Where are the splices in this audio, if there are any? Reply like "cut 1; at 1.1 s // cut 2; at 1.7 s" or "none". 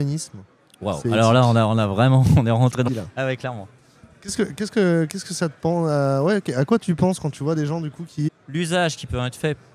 cut 1; at 2.9 s // cut 2; at 8.3 s